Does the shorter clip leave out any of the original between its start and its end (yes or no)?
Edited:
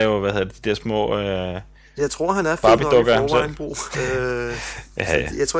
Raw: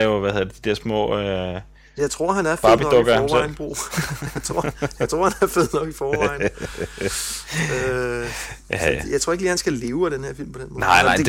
yes